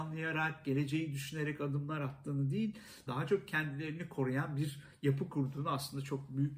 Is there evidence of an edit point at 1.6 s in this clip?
no; 1 cut; at 3.1 s

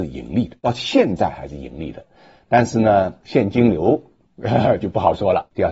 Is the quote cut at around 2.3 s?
no; 0 cuts

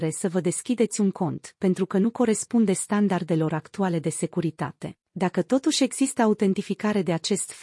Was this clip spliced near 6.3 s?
no; 1 cut; at 5.0 s

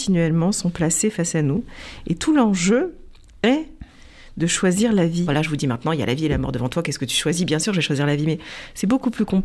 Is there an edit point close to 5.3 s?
yes; 1 cut; at 5.3 s

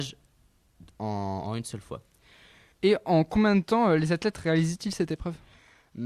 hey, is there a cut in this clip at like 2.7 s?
yes; 1 cut; at 2.7 s

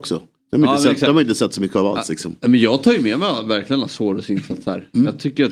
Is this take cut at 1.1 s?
no; 0 cuts

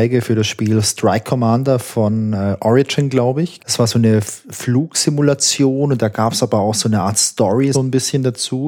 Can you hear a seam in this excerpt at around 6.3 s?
no; 2 cuts; at 3.6 s, 7.7 s

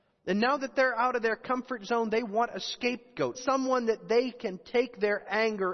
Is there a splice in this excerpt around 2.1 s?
no; 1 cut; at 3.3 s

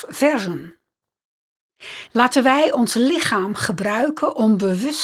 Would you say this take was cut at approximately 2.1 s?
yes; 1 cut; at 2.1 s

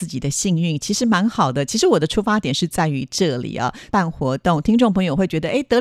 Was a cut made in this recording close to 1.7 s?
no; 1 cut; at 3.9 s

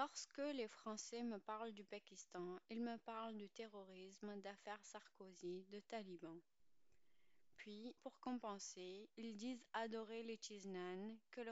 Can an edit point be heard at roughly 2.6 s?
no; 1 cut; at 8.0 s

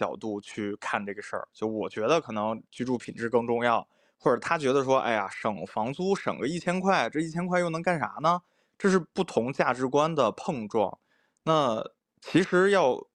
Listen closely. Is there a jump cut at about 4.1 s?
no; 1 cut; at 8.7 s

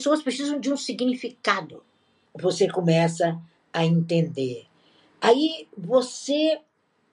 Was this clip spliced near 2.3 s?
yes; 1 cut; at 2.3 s

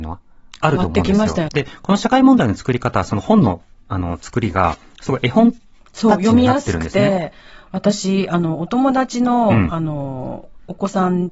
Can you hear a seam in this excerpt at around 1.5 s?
yes; 1 cut; at 1.5 s

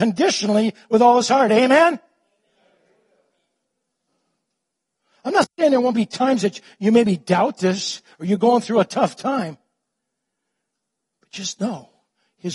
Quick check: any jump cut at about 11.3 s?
no; 0 cuts

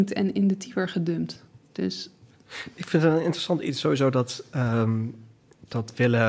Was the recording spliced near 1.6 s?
yes; 1 cut; at 1.6 s

